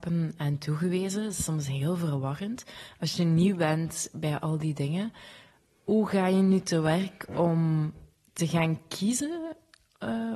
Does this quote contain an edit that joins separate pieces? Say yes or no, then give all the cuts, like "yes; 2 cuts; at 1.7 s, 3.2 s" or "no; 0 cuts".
no; 0 cuts